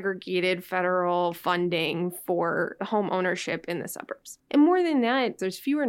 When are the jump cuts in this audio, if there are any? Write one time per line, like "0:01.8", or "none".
0:04.5

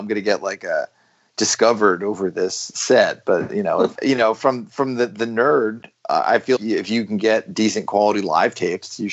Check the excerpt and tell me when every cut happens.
0:03.9
0:06.6

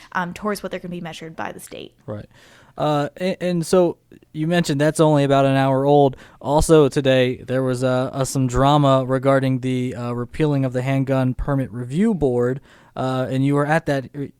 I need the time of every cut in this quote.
0:01.3

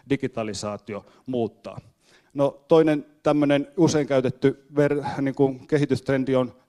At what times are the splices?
0:02.2

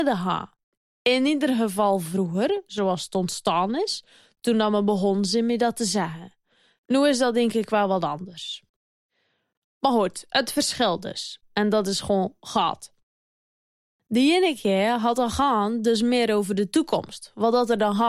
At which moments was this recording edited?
0:11.4

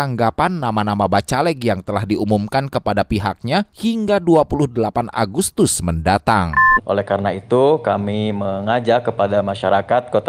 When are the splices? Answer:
0:06.8

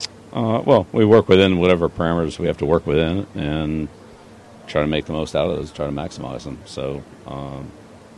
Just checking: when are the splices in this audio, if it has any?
none

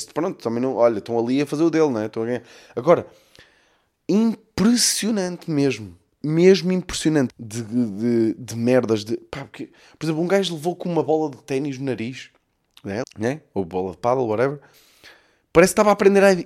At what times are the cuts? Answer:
0:07.3
0:13.0
0:14.7

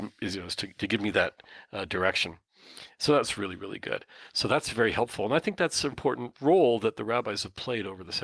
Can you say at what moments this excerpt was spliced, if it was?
0:04.3
0:05.9

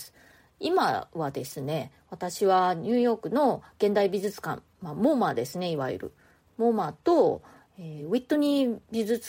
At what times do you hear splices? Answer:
none

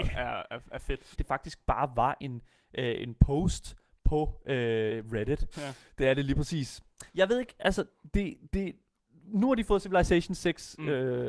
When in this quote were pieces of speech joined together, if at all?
0:01.1
0:05.5
0:07.1

